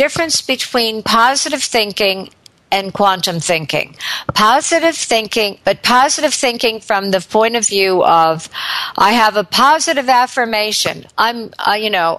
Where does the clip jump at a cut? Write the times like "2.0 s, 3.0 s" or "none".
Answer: 5.6 s